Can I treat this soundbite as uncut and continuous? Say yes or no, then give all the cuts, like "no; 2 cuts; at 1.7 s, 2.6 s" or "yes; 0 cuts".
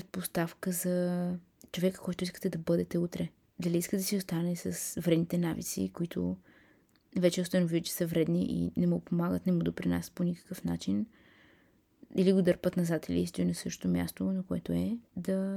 no; 1 cut; at 3.5 s